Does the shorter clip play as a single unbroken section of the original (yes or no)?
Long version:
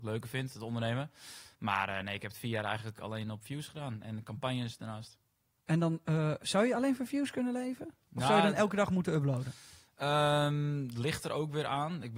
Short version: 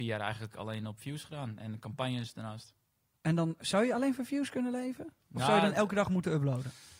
no